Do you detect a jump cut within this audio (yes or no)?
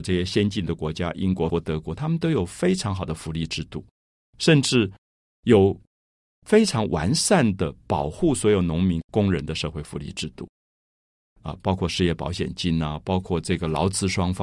yes